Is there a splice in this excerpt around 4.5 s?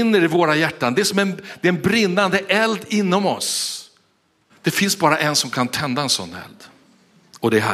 yes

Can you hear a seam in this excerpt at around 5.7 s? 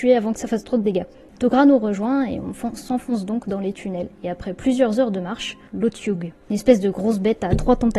yes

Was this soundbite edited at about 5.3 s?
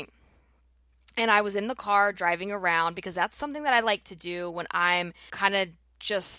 yes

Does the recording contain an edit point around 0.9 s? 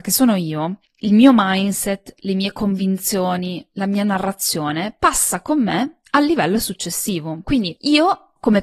no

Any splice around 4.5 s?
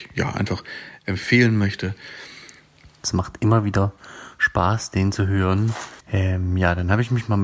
no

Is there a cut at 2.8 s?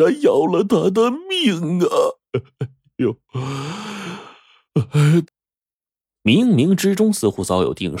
no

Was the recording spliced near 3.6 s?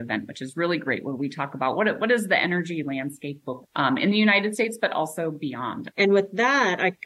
yes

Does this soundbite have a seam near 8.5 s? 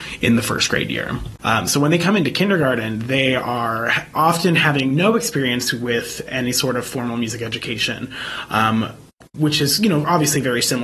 no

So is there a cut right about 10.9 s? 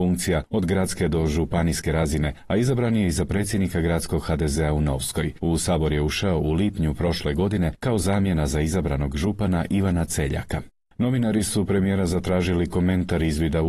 no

